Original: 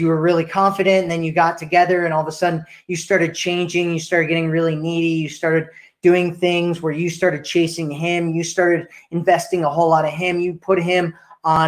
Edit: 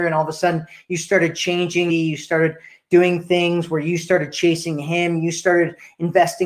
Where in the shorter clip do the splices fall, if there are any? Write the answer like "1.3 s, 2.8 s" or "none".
1.9 s

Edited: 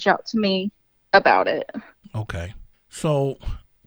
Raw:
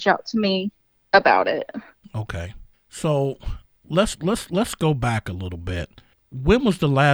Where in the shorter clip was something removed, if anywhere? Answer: none

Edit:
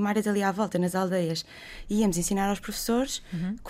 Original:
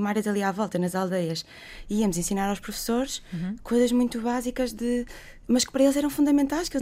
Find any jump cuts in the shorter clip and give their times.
none

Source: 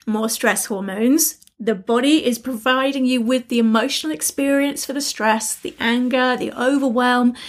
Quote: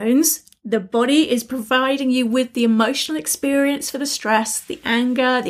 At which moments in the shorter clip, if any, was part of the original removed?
none

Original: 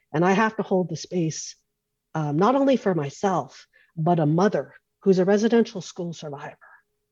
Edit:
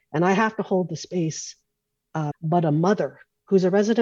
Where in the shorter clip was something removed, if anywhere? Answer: 2.3 s

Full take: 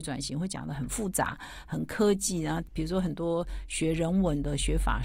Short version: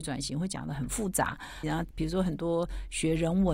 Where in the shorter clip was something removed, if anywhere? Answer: 1.6 s

